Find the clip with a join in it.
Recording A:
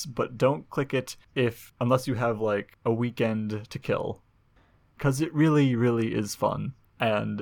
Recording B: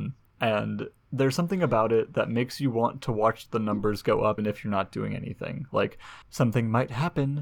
B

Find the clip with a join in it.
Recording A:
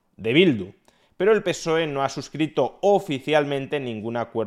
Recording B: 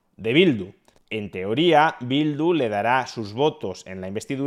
B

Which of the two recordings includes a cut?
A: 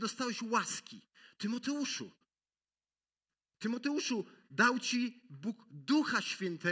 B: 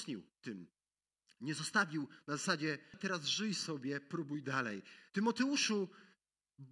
B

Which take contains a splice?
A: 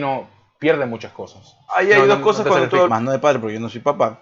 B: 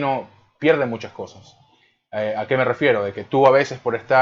A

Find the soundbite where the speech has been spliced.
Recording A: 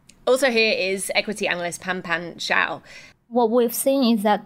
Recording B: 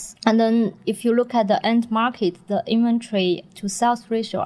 A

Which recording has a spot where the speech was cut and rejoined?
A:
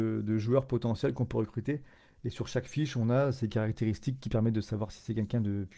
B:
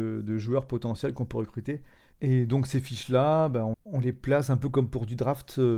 B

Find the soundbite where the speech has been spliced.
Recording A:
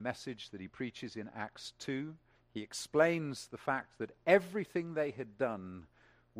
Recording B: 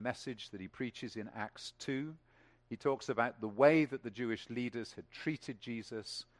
A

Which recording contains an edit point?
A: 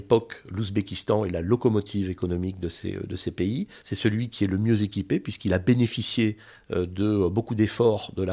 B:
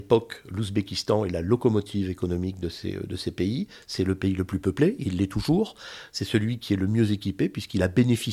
A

